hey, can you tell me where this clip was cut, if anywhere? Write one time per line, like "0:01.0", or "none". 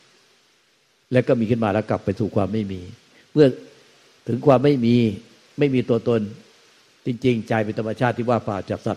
none